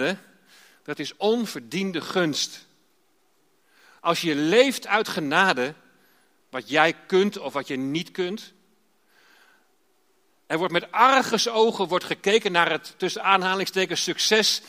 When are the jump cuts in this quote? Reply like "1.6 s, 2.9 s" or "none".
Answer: 6.4 s, 10.3 s